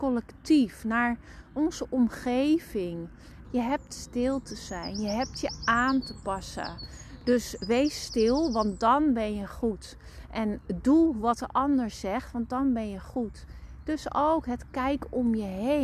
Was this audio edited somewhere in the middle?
yes; 1 cut; at 3.4 s

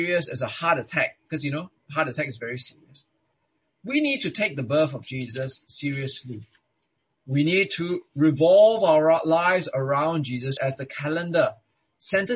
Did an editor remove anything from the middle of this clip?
yes; 2 cuts; at 3.7 s, 10.6 s

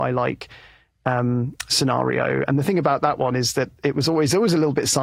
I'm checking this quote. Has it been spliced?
no; 0 cuts

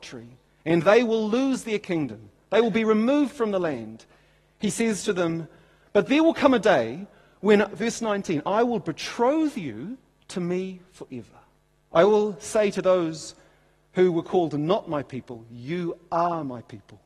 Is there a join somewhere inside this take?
yes; 1 cut; at 11.9 s

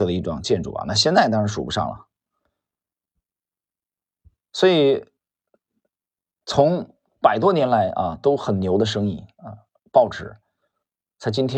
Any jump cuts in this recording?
no; 0 cuts

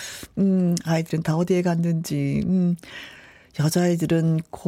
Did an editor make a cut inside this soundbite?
no; 0 cuts

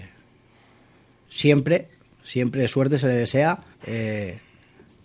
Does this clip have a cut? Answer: yes; 2 cuts; at 1.3 s, 3.7 s

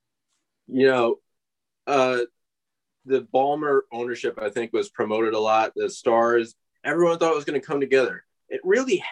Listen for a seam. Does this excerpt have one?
no; 0 cuts

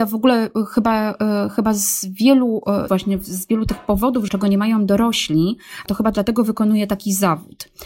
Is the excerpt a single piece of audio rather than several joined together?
no; 2 cuts; at 2.9 s, 4.3 s

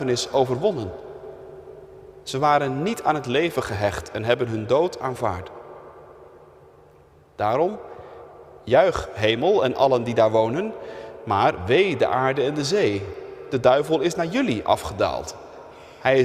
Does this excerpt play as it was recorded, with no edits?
yes; 0 cuts

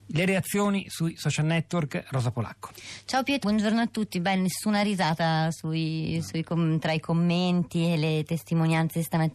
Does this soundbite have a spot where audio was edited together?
yes; 1 cut; at 3.4 s

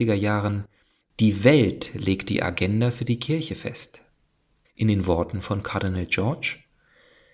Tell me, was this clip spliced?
yes; 1 cut; at 4.6 s

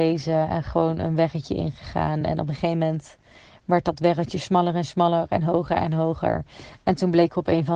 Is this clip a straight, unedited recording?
yes; 0 cuts

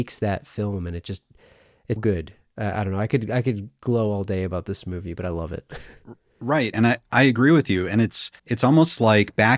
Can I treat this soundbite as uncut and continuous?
no; 3 cuts; at 2.0 s, 6.7 s, 8.4 s

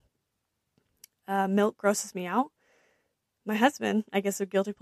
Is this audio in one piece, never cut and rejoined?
yes; 0 cuts

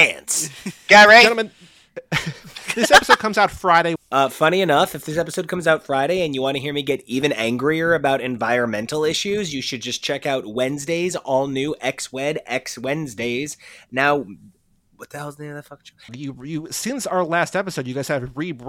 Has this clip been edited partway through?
yes; 2 cuts; at 4.0 s, 16.1 s

